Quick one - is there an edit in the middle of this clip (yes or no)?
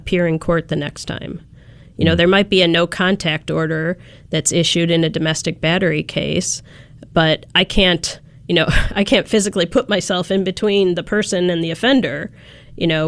no